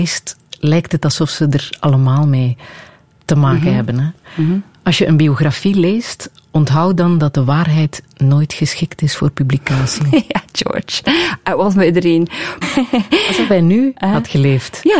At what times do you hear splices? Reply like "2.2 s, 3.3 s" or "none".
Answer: 12.6 s